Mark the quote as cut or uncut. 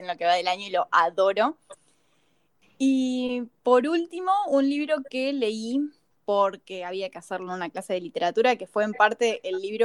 uncut